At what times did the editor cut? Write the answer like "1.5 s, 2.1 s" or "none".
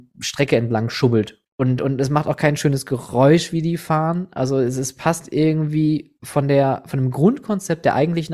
1.4 s